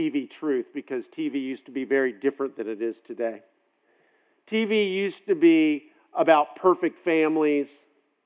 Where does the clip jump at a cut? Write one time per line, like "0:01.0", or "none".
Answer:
none